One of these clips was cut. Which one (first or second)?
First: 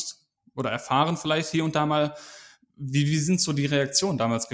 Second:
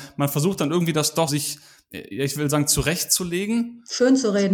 second